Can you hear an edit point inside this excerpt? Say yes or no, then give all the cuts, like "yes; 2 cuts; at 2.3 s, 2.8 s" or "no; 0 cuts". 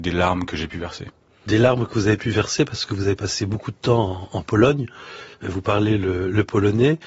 no; 0 cuts